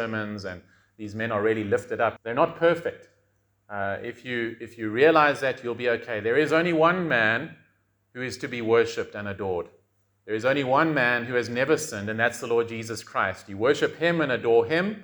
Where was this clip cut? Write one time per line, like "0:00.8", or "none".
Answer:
0:02.2